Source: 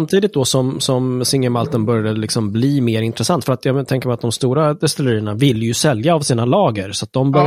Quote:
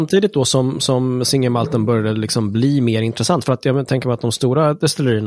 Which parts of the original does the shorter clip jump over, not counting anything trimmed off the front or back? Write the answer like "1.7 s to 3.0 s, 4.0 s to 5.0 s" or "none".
none